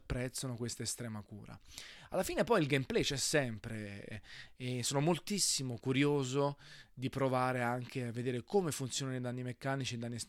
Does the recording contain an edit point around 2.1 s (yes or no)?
no